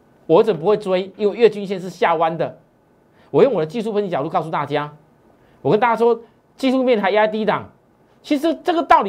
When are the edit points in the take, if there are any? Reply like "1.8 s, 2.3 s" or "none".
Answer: none